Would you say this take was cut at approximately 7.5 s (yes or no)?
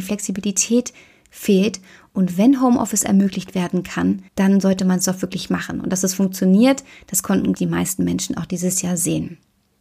yes